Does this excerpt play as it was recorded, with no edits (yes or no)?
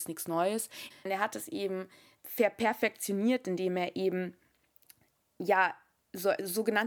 no